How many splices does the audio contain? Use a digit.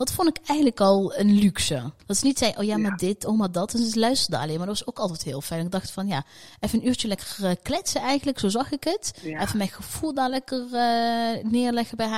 1